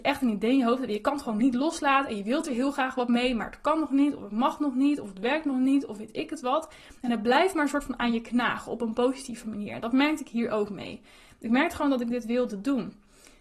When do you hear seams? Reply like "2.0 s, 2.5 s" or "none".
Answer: none

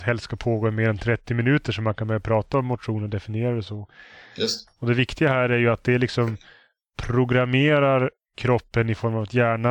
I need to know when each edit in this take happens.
4.7 s

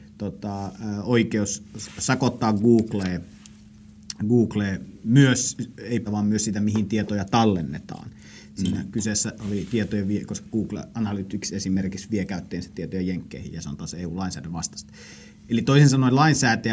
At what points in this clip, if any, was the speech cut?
6.1 s

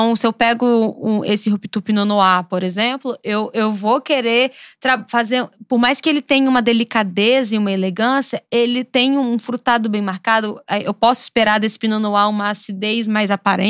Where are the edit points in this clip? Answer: none

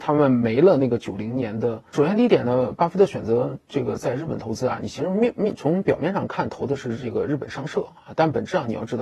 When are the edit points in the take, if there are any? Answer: 1.9 s

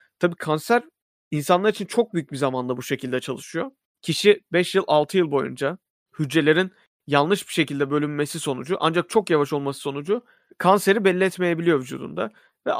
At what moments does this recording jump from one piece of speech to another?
none

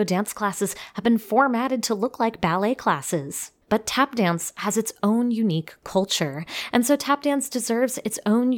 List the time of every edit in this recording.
3.6 s

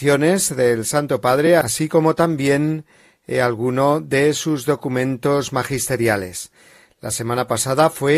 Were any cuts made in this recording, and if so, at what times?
none

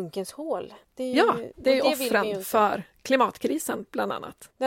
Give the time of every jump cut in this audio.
1.5 s

